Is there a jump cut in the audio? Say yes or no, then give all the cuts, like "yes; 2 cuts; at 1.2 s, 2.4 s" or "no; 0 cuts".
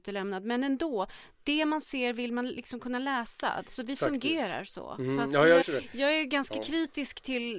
yes; 1 cut; at 5.6 s